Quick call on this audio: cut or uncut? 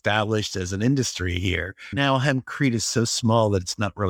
uncut